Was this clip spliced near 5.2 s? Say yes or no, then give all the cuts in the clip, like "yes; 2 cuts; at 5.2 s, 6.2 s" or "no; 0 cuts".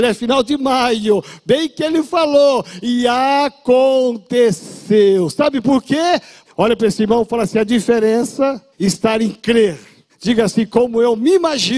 no; 3 cuts; at 6.5 s, 8.7 s, 10.1 s